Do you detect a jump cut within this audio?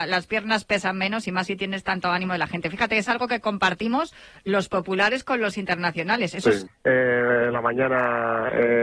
yes; 1 cut; at 6.7 s

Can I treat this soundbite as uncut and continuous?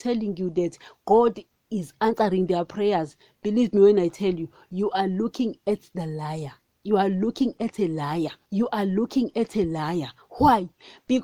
no; 1 cut; at 8.4 s

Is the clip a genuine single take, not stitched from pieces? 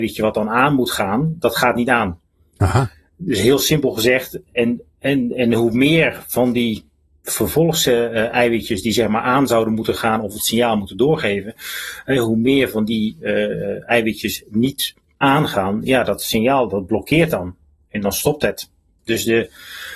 no; 1 cut; at 19.0 s

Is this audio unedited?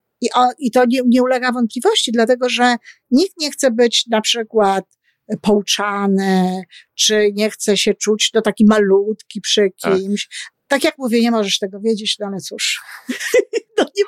no; 1 cut; at 10.5 s

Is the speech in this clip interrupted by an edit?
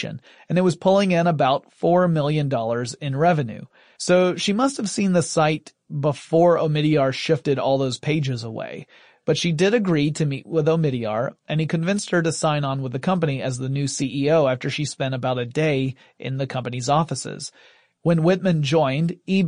yes; 1 cut; at 4.0 s

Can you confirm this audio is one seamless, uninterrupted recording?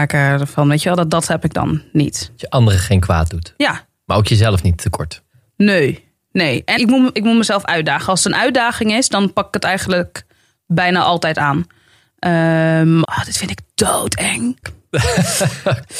no; 3 cuts; at 6.8 s, 13.0 s, 14.6 s

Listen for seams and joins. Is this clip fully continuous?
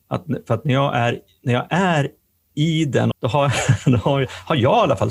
no; 1 cut; at 3.1 s

